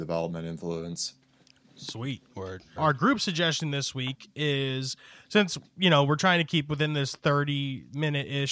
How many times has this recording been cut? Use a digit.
1